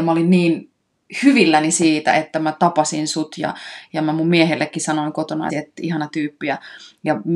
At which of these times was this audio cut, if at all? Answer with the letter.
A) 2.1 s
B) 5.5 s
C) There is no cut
B